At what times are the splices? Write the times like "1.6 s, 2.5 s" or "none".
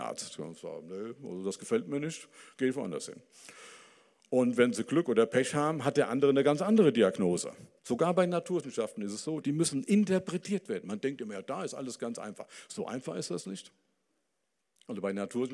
7.8 s, 9.4 s